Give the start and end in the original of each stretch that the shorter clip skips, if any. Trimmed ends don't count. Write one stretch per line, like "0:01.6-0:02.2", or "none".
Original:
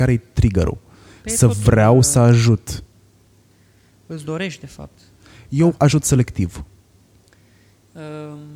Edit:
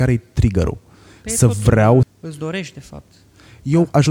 0:02.0-0:03.9